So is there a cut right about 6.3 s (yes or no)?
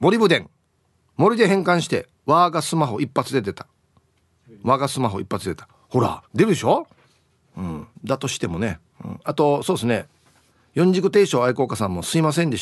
yes